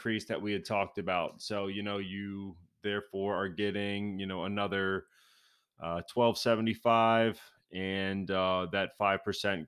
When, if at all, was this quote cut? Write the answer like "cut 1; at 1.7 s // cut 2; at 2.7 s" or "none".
none